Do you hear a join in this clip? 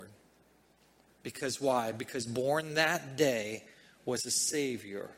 yes; 1 cut; at 1.1 s

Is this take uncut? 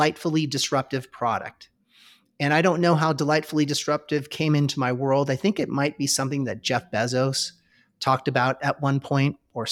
yes; 0 cuts

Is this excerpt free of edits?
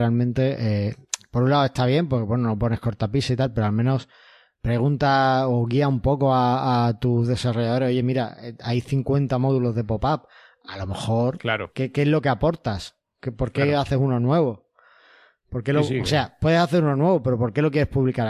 yes; 0 cuts

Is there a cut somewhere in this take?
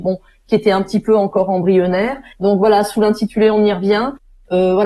yes; 1 cut; at 2.3 s

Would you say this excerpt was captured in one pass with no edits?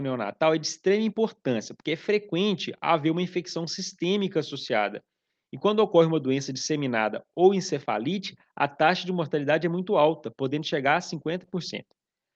yes; 0 cuts

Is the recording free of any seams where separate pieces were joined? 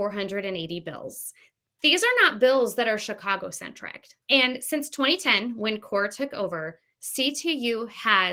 no; 1 cut; at 4.2 s

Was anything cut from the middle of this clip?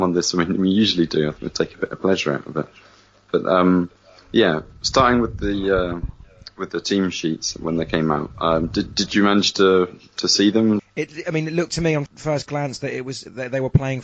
yes; 2 cuts; at 10.8 s, 12.1 s

